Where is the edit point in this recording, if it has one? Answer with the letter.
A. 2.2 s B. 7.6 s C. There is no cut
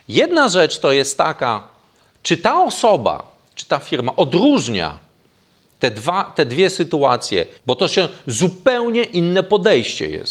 B